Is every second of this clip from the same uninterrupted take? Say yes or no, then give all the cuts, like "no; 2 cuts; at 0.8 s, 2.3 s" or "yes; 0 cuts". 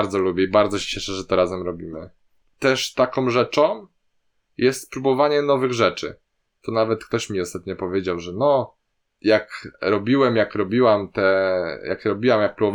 yes; 0 cuts